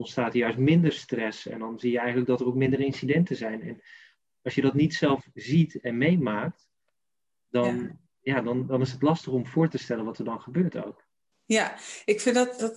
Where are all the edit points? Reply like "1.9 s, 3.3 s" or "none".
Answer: none